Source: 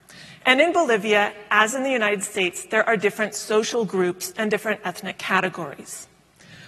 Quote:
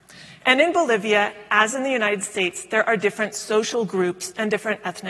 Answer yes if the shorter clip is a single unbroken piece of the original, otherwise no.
yes